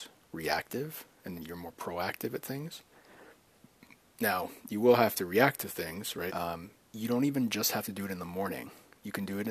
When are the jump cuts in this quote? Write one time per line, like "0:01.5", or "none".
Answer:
0:06.3